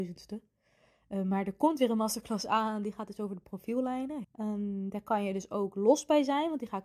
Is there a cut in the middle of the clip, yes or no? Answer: yes